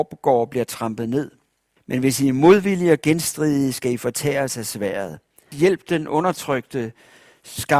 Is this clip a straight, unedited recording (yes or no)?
no